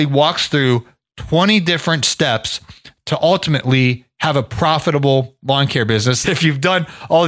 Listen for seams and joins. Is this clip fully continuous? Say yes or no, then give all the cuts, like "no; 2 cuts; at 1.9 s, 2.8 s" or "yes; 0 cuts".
no; 1 cut; at 6.2 s